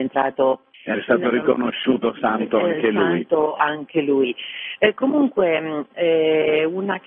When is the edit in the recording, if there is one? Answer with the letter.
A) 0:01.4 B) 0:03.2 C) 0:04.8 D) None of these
D